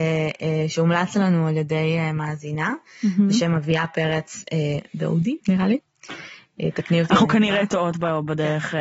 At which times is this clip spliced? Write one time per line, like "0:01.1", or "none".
0:05.4